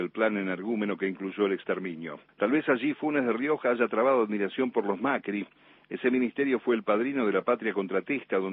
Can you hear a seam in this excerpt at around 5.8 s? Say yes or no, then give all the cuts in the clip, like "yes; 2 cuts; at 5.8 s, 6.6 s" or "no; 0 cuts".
no; 1 cut; at 2.3 s